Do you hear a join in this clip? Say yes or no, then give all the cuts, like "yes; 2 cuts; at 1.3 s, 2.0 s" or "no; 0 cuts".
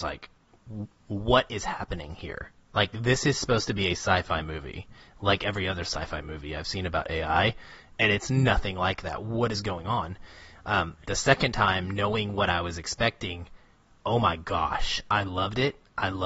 no; 0 cuts